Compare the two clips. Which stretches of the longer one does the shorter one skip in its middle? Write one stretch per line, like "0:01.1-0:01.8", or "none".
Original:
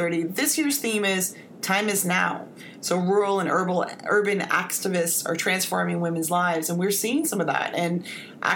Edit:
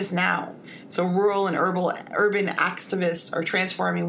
none